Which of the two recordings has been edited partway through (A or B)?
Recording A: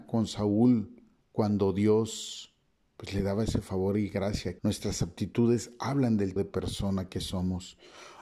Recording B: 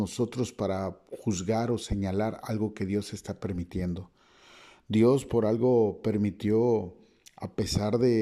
A